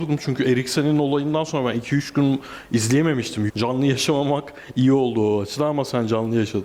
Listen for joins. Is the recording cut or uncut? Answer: cut